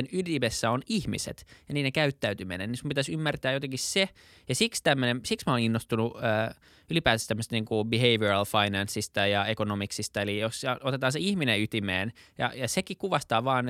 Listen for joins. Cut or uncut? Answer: uncut